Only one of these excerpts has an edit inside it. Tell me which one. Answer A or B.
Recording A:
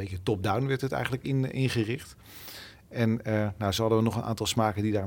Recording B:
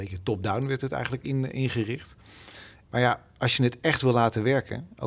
B